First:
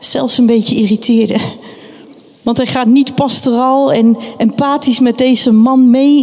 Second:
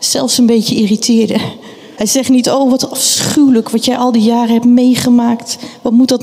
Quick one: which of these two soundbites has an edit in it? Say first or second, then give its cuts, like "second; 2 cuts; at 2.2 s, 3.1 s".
second; 1 cut; at 2.0 s